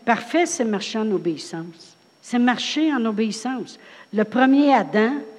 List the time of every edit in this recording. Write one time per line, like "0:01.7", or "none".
0:02.1